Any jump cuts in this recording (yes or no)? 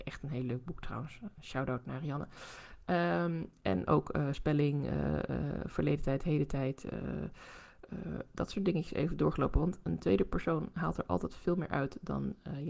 no